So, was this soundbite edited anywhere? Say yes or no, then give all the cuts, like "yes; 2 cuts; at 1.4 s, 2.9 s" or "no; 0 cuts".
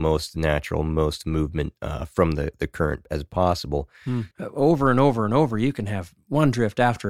yes; 1 cut; at 4.3 s